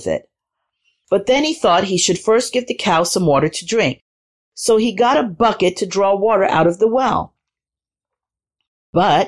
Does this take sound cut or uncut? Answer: uncut